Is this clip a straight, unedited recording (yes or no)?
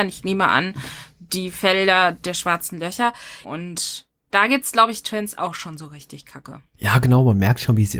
no